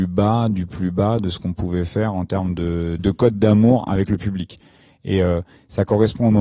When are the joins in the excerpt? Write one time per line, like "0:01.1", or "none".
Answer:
0:03.0